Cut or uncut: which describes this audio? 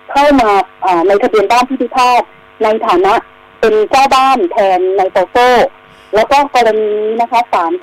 uncut